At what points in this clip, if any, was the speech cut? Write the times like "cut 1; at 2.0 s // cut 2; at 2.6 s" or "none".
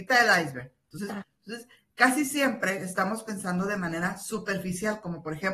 cut 1; at 1.2 s